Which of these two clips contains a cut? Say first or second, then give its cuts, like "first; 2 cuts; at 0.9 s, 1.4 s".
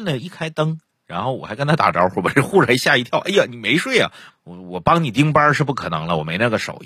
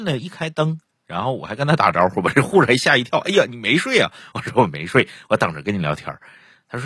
first; 1 cut; at 4.3 s